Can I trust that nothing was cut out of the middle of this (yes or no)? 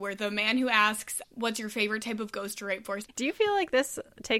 no